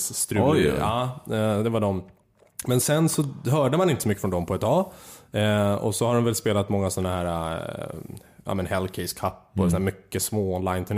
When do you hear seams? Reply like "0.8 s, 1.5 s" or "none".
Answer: 2.8 s